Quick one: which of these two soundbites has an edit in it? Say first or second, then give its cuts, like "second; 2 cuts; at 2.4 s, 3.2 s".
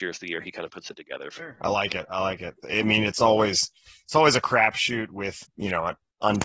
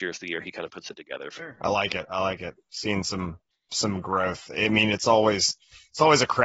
first; 2 cuts; at 2.6 s, 5.4 s